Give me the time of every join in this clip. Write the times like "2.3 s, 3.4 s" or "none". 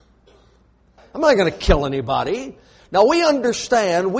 1.0 s, 2.8 s